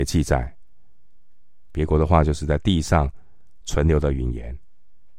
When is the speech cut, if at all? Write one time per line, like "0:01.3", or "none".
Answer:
0:01.7

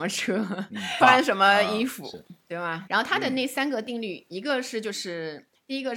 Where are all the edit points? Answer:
0:01.0
0:02.9

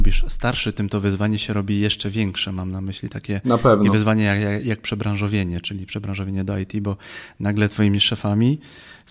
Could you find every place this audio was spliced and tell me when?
none

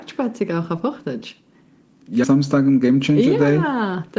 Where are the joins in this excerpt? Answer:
0:02.2

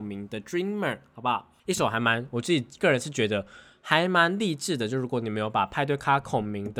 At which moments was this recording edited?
0:01.6

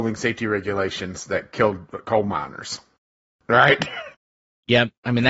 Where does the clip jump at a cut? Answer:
none

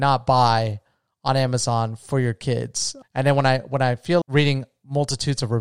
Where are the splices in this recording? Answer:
0:03.0
0:04.2

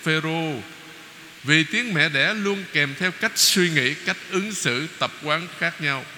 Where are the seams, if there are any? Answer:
0:01.4

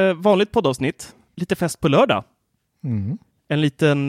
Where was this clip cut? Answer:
0:01.3

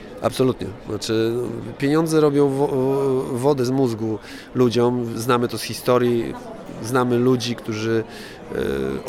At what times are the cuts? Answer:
none

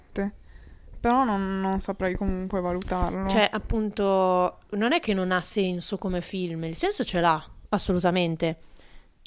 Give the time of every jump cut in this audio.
0:07.6

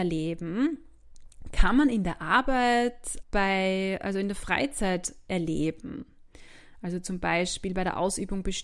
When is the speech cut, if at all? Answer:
0:03.2

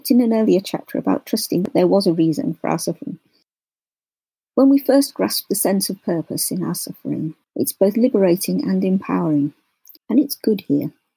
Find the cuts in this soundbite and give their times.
0:10.0

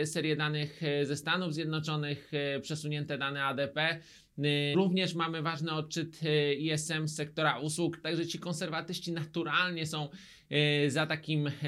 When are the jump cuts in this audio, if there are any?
0:04.7
0:08.0

